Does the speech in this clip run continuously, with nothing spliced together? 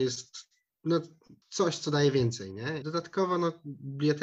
no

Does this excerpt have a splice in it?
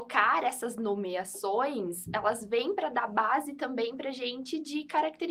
no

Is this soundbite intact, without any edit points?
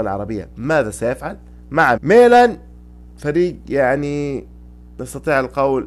no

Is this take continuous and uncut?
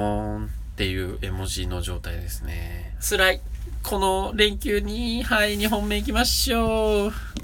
no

